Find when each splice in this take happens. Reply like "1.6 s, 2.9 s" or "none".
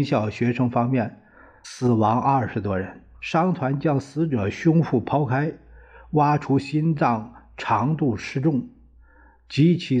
none

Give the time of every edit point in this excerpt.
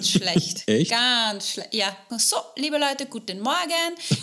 2.1 s

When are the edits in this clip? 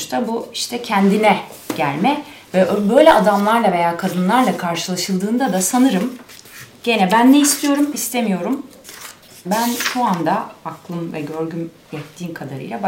7.9 s, 9.4 s

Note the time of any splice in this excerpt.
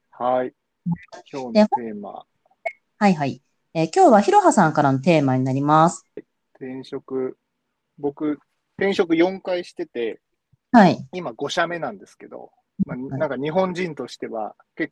6.2 s

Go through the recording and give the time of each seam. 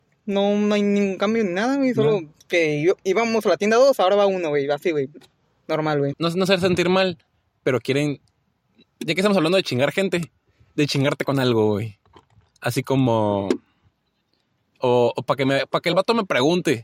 6.1 s, 14.8 s

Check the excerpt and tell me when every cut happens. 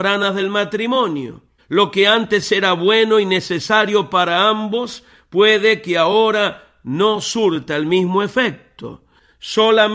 1.6 s

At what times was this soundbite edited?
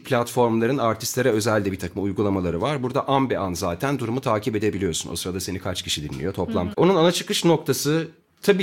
6.7 s

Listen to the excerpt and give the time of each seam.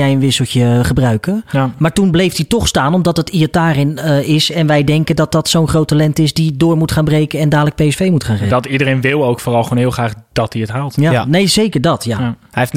none

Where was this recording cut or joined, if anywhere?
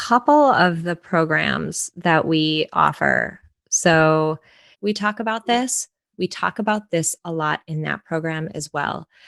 4.7 s, 6.1 s

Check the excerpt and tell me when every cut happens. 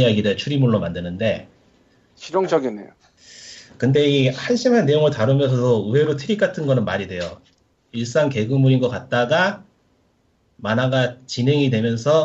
7.8 s

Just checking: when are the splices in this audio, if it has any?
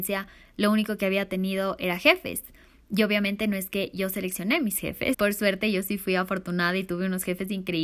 5.1 s

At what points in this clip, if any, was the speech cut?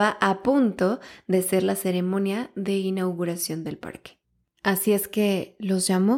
4.4 s

